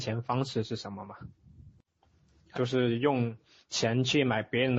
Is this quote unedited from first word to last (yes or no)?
no